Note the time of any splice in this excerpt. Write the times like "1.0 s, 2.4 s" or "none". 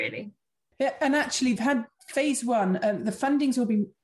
1.6 s